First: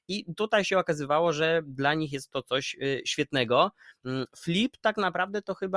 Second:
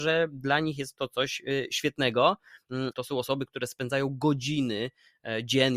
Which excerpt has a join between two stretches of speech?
second; 1 cut; at 2.9 s

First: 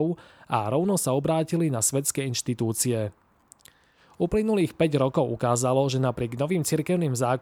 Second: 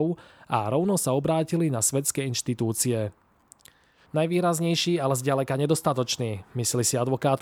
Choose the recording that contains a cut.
second; 1 cut; at 4.1 s

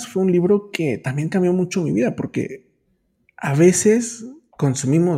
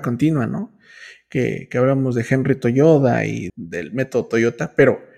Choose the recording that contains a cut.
second; 1 cut; at 3.5 s

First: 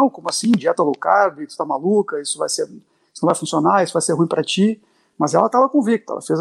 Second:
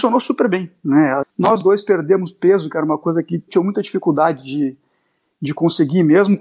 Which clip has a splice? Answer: second; 2 cuts; at 1.2 s, 3.5 s

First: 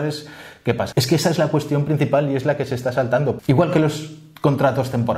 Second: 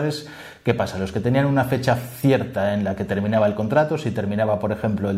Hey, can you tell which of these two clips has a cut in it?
first; 2 cuts; at 0.9 s, 3.4 s

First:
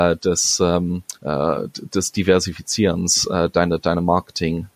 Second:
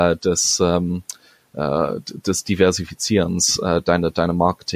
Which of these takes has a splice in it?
first; 1 cut; at 1.2 s

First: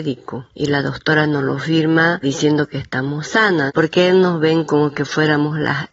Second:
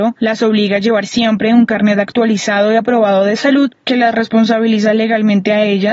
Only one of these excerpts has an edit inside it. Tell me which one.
first; 2 cuts; at 2.2 s, 3.7 s

